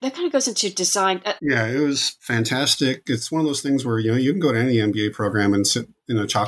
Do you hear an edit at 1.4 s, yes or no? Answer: yes